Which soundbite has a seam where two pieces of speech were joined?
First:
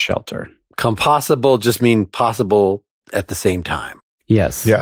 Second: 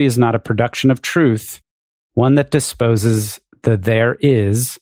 second; 1 cut; at 2.0 s

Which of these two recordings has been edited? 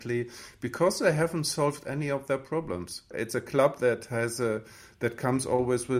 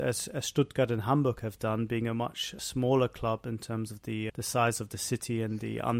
second; 2 cuts; at 2.6 s, 4.3 s

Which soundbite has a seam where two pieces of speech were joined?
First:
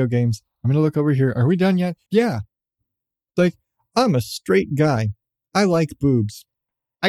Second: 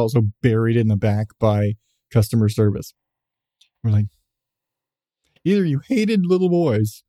first; 1 cut; at 2.1 s

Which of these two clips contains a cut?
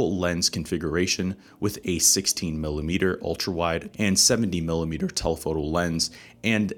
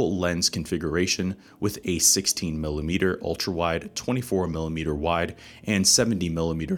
first; 1 cut; at 3.9 s

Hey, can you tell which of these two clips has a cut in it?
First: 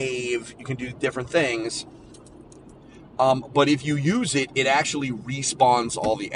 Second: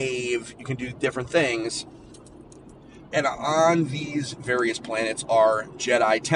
second; 1 cut; at 3.1 s

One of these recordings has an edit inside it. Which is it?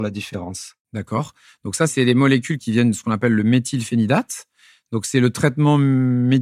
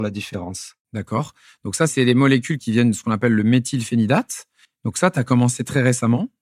second; 1 cut; at 4.6 s

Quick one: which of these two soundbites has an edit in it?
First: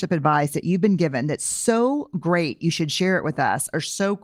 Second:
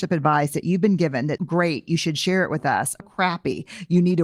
second; 2 cuts; at 1.4 s, 3.0 s

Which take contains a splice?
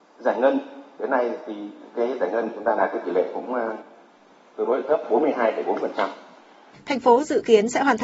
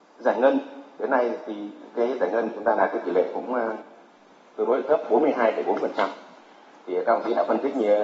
first; 1 cut; at 6.7 s

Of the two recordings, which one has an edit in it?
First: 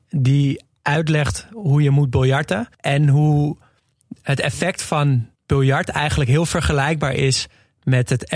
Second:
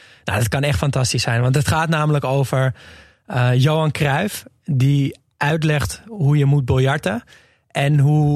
first; 2 cuts; at 2.7 s, 5.4 s

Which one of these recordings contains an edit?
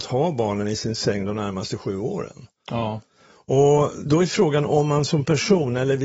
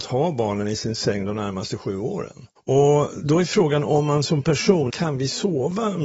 second; 2 cuts; at 2.6 s, 4.9 s

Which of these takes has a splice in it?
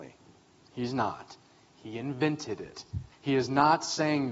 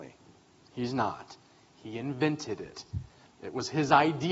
first; 1 cut; at 3.1 s

